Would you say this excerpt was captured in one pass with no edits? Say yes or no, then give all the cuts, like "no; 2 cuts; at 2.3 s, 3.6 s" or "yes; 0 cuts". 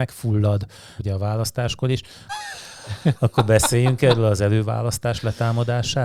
no; 2 cuts; at 1.0 s, 2.3 s